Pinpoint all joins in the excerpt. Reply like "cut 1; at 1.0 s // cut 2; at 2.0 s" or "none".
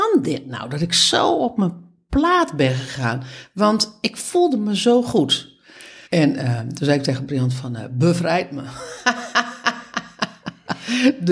cut 1; at 6.1 s